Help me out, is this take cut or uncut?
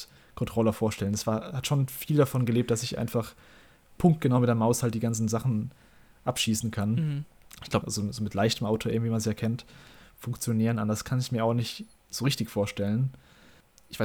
cut